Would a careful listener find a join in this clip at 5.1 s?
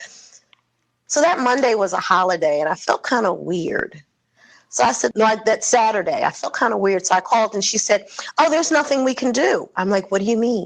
yes; 2 cuts; at 1.1 s, 5.1 s

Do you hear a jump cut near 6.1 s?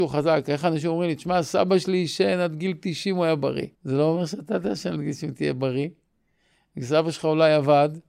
no; 1 cut; at 3.7 s

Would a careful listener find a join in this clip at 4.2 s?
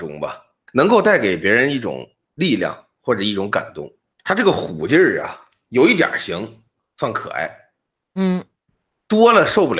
yes; 1 cut; at 4.2 s

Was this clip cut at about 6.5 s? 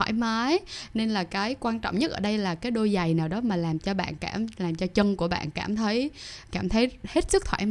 yes; 1 cut; at 6.5 s

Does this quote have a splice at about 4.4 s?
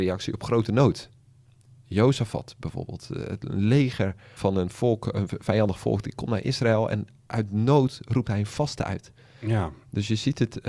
yes; 2 cuts; at 4.4 s, 9.3 s

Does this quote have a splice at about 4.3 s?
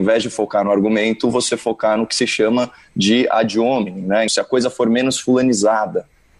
yes; 1 cut; at 4.3 s

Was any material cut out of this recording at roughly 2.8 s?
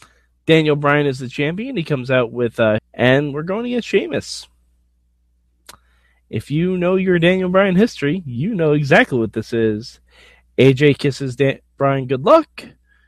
yes; 1 cut; at 2.8 s

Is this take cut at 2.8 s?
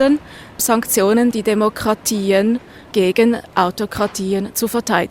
no; 1 cut; at 1.3 s

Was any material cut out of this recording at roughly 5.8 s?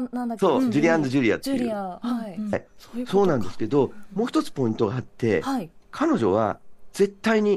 yes; 2 cuts; at 2.5 s, 5.8 s

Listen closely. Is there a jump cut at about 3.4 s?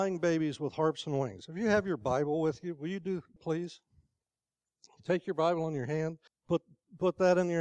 yes; 2 cuts; at 3.4 s, 6.3 s

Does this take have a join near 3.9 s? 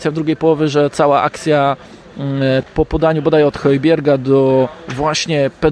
no; 1 cut; at 2.6 s

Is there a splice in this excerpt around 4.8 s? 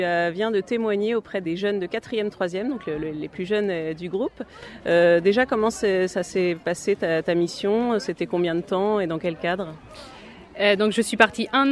no; 1 cut; at 1.4 s

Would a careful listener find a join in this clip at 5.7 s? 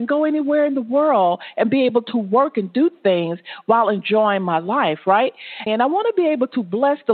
yes; 1 cut; at 5.7 s

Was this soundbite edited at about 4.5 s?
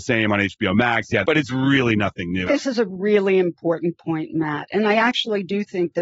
no; 2 cuts; at 1.2 s, 2.5 s

